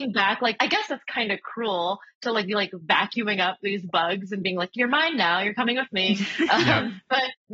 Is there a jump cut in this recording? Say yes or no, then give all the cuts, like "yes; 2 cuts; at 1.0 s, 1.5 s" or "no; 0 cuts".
no; 0 cuts